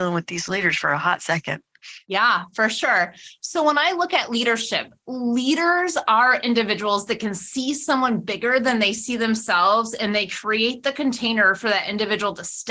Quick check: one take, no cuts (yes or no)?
no